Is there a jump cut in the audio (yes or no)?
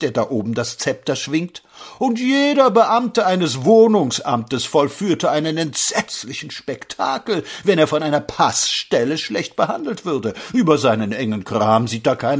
no